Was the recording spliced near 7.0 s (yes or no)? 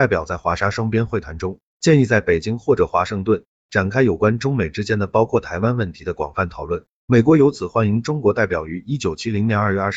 yes